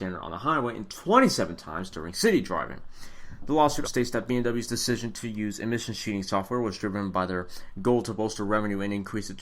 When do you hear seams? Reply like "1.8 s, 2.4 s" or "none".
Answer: 3.8 s